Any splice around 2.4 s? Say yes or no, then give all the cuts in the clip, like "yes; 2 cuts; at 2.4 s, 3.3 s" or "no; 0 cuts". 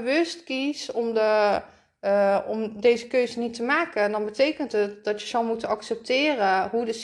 no; 0 cuts